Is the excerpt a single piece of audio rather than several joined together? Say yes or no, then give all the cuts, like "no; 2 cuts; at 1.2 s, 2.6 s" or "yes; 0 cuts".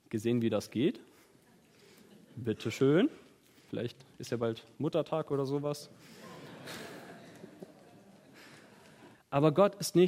no; 2 cuts; at 3.7 s, 9.1 s